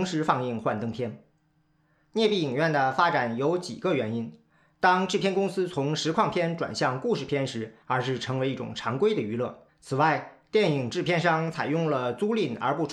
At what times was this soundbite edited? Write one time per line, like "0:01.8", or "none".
0:07.8
0:09.7